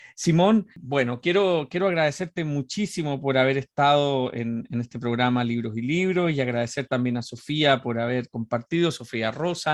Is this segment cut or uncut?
uncut